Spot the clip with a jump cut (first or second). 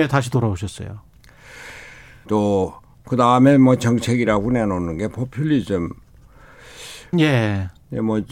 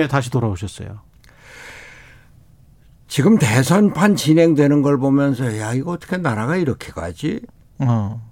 first